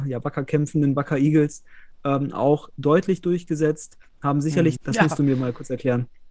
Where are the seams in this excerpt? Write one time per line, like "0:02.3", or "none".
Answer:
0:04.8

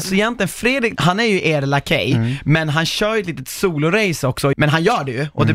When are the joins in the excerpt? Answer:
0:01.0
0:04.5

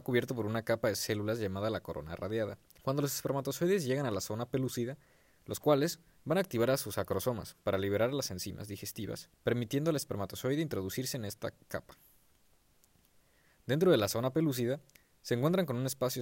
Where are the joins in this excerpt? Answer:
0:02.8
0:05.4
0:09.3

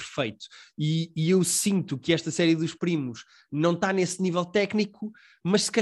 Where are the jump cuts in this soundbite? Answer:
none

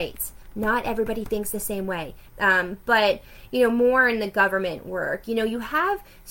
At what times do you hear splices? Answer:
0:02.3

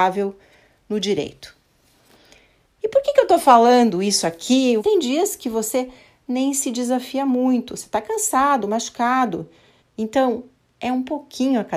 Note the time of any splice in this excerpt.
0:04.8
0:09.8

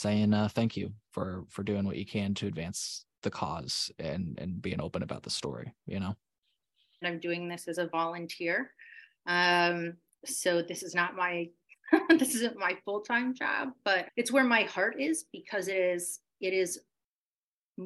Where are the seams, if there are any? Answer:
0:07.0
0:14.1

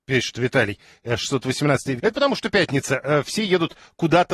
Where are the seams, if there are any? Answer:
0:02.0

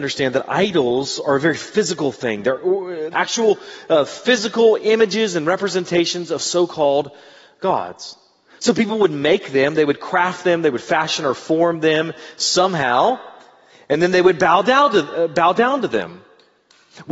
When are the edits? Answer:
0:03.1

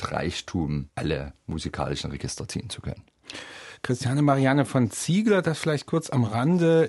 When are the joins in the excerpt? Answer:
none

